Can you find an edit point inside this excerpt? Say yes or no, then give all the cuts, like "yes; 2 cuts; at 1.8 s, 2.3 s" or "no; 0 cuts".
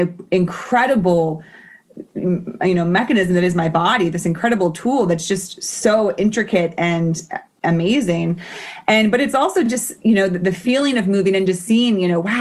no; 0 cuts